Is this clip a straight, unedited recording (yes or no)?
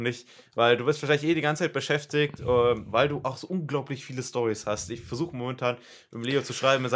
yes